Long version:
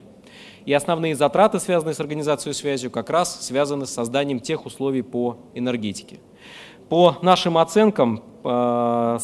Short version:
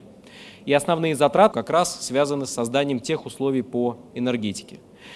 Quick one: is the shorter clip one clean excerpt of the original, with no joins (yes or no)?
no